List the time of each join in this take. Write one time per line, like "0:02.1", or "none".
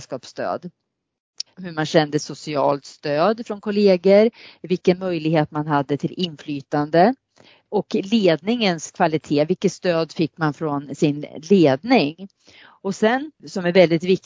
0:01.5